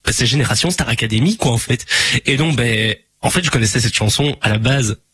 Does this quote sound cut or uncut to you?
uncut